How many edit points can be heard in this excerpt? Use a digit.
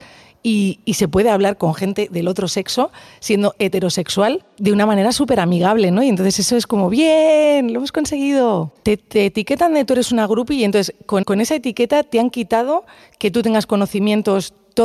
2